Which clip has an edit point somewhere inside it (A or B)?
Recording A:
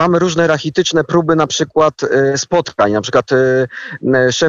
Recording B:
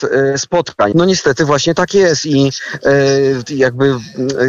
B